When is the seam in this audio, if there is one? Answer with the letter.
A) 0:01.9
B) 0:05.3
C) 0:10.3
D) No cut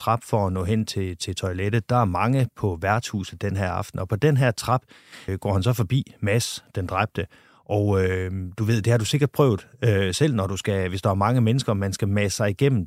B